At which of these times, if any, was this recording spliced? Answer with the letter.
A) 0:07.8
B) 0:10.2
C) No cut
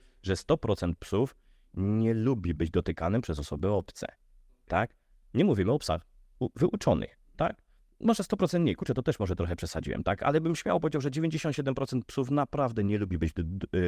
C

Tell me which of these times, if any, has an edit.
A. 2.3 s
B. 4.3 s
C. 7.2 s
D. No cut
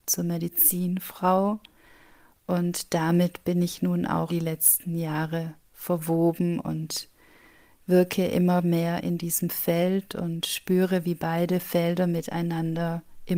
B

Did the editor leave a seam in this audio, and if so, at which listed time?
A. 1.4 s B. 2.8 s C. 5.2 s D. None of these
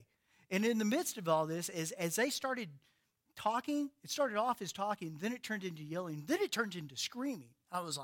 D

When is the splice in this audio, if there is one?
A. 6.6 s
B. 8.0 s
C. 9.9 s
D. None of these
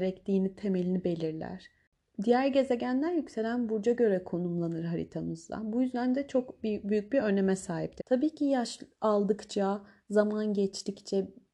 B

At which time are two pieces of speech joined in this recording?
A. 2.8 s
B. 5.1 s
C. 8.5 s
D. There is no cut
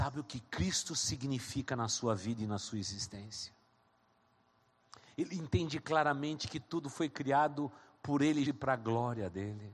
C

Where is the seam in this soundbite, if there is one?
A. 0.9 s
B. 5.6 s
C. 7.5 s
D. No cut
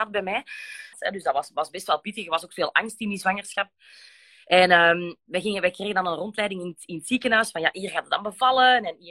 A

